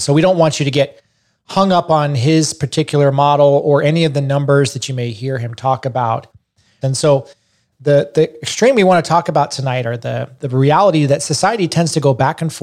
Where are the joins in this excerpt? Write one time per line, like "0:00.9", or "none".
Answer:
0:06.8
0:10.4